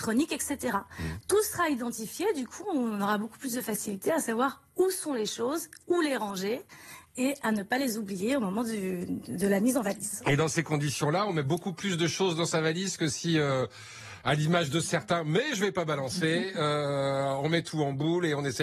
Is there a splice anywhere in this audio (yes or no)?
no